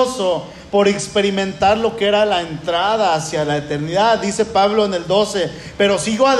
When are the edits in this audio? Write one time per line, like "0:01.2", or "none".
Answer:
none